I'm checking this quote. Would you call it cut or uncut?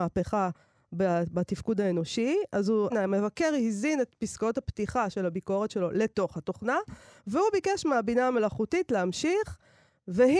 cut